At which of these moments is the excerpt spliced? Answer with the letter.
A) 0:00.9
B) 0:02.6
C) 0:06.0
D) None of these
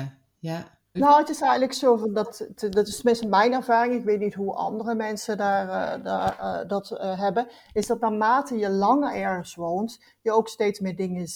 A